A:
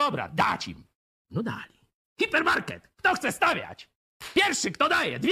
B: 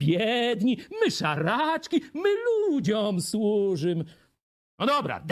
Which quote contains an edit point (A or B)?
A